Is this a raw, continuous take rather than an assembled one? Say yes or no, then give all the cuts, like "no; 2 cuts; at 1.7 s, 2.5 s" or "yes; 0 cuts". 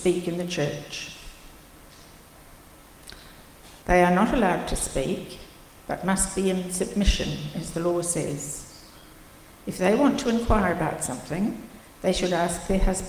no; 1 cut; at 3.8 s